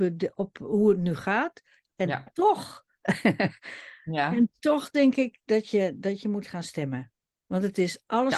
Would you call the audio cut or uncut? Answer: uncut